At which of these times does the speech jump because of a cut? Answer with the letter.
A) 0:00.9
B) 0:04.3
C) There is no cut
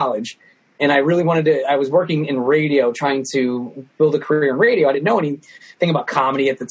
C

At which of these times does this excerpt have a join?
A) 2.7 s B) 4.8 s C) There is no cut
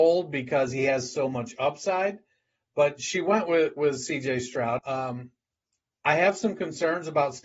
B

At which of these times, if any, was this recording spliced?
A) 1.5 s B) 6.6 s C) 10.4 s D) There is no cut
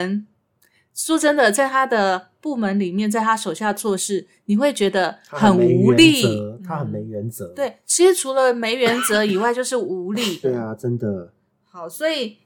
C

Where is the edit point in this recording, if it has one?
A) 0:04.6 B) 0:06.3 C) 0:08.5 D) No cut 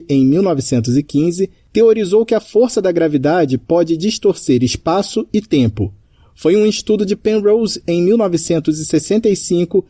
D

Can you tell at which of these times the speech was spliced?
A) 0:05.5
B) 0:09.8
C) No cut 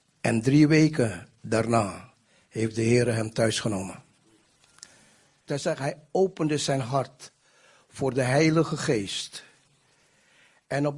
A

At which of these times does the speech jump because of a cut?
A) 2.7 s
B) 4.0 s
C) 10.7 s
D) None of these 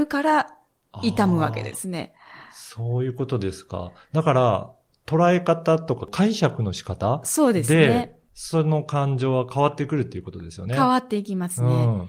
D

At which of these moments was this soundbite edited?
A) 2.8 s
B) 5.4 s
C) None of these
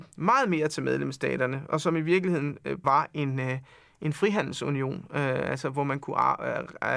A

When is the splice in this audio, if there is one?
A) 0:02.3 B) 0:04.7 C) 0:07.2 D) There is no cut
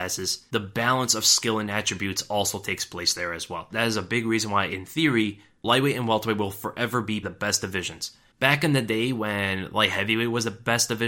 C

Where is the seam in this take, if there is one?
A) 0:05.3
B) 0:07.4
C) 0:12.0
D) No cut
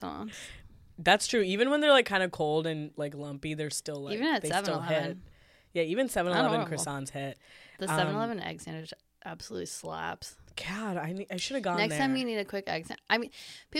D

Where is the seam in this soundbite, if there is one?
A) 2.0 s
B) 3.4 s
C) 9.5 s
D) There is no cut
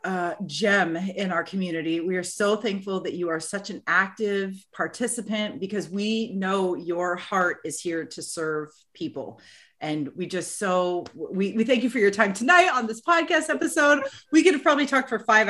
D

